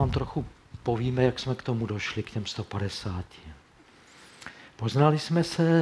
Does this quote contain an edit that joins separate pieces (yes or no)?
no